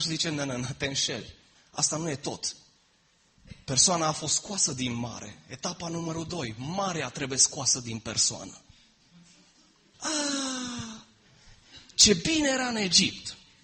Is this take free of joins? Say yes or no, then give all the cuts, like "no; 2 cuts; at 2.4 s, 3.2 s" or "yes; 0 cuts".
no; 1 cut; at 9.9 s